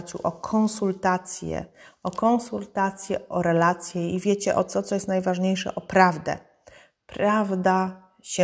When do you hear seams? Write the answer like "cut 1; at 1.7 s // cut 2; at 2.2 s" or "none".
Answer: none